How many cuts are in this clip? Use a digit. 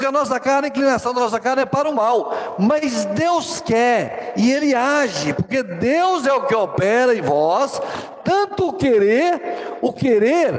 0